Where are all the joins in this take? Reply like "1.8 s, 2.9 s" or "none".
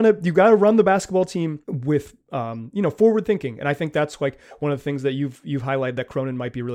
1.6 s